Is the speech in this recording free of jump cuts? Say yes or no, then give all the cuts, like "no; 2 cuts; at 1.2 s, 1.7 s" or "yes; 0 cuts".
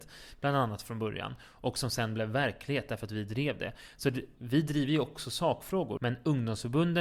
no; 1 cut; at 6.0 s